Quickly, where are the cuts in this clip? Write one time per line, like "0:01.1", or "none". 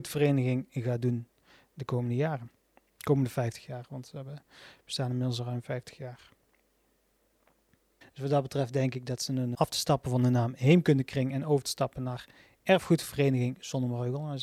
0:08.0
0:09.5